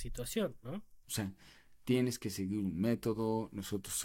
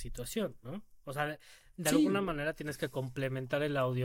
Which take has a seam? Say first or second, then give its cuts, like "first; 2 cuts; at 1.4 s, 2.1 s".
first; 1 cut; at 1.0 s